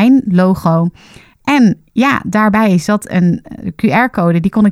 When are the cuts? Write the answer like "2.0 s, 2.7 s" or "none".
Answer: none